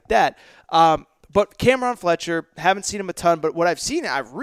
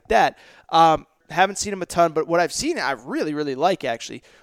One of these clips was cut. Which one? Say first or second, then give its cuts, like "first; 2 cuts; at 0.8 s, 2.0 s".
second; 1 cut; at 1.2 s